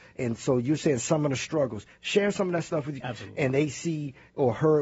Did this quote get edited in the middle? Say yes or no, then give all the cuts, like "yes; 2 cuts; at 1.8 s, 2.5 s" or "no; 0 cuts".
yes; 1 cut; at 3.0 s